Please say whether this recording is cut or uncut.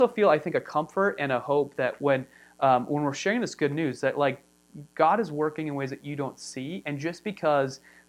uncut